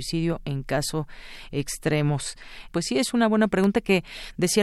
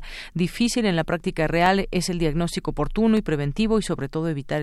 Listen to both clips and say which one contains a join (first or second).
first